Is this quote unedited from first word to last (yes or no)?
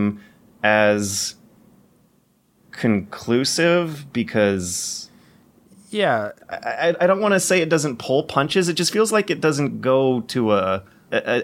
no